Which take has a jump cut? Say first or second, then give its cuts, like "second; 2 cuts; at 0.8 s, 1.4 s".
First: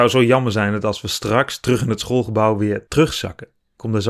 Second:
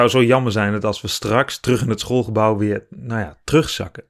first; 1 cut; at 2.9 s